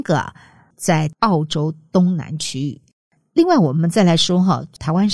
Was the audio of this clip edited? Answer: yes; 1 cut; at 3.2 s

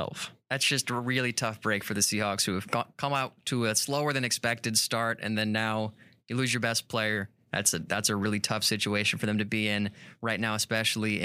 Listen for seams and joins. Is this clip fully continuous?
yes; 0 cuts

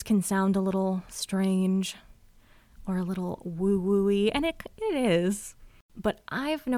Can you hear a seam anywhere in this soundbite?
no; 0 cuts

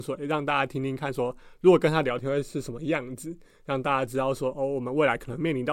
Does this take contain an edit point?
no; 0 cuts

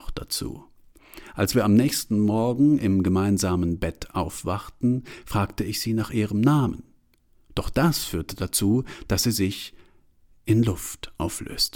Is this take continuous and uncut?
yes; 0 cuts

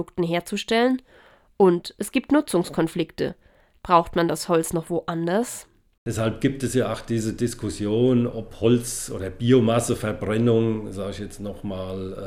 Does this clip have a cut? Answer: no; 0 cuts

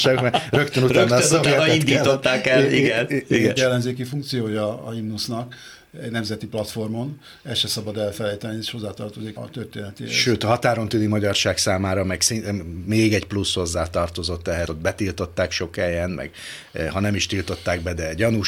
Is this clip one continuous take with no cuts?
no; 3 cuts; at 3.6 s, 9.4 s, 14.7 s

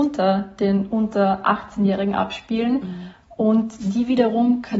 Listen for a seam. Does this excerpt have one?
no; 0 cuts

